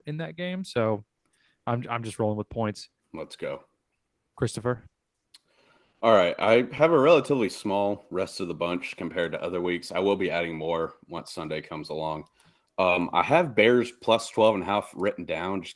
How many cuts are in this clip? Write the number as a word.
one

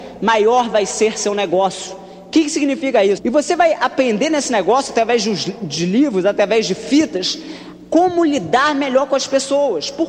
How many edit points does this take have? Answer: one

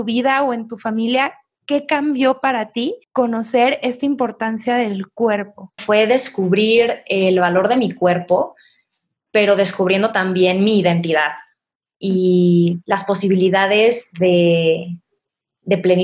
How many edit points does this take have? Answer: one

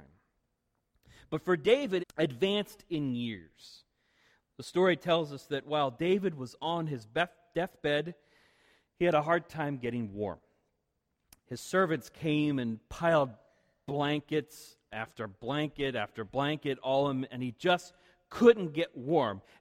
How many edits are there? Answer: one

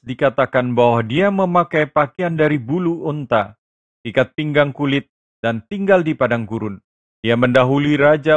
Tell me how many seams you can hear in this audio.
one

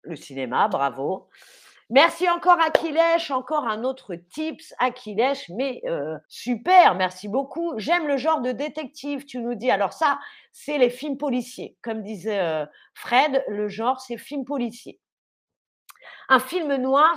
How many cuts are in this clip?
one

